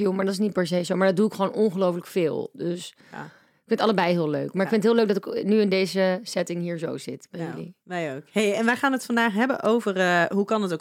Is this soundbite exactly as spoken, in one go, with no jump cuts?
yes; 0 cuts

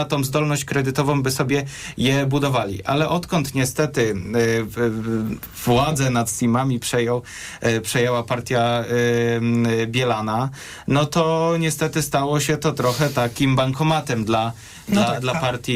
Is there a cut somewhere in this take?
no; 0 cuts

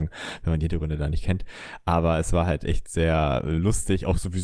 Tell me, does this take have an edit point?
no; 0 cuts

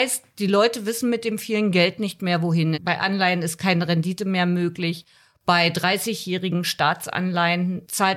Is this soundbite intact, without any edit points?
no; 1 cut; at 2.7 s

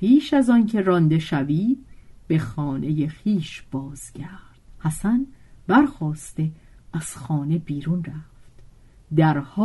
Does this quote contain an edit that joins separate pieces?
yes; 1 cut; at 4.7 s

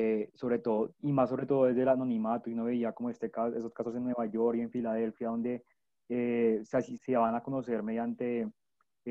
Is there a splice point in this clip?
yes; 1 cut; at 7.0 s

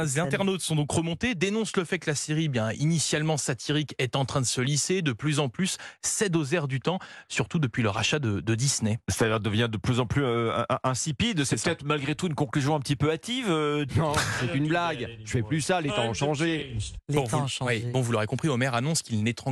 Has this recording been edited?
yes; 1 cut; at 13.9 s

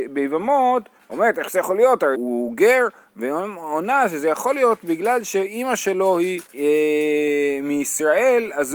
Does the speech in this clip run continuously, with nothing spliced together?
no; 2 cuts; at 2.1 s, 6.5 s

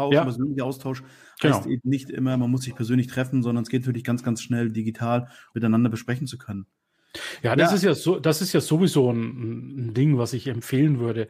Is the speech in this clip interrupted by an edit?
yes; 1 cut; at 5.5 s

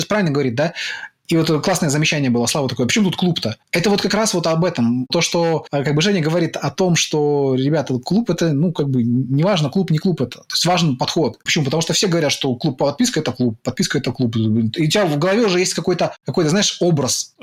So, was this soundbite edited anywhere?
yes; 1 cut; at 11.5 s

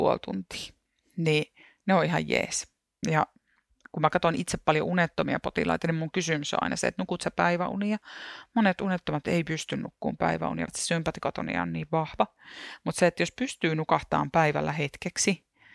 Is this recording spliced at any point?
yes; 2 cuts; at 3.0 s, 10.7 s

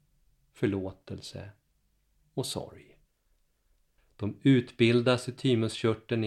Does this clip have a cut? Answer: yes; 1 cut; at 4.0 s

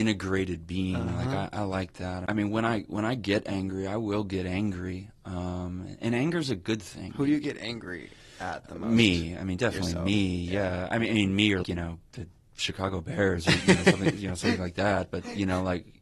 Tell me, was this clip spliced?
yes; 1 cut; at 11.6 s

